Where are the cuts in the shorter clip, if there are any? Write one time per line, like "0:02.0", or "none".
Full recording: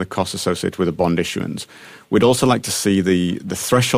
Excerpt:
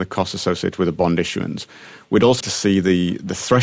0:02.4

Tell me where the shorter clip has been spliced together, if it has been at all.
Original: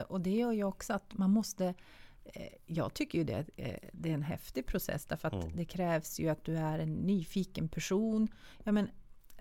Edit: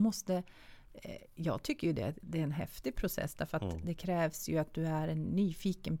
0:02.2

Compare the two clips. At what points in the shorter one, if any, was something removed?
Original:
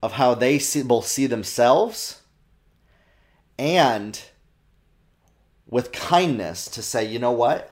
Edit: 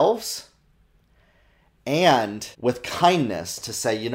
0:02.5

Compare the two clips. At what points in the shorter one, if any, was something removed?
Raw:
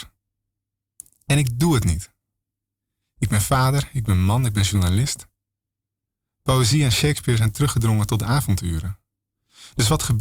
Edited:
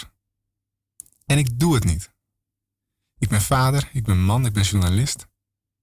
none

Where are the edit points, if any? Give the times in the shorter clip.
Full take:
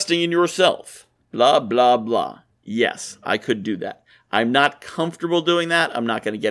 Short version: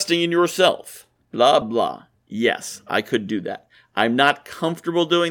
0:01.6

